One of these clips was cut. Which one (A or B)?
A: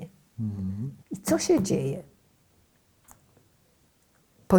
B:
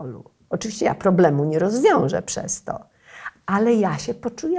A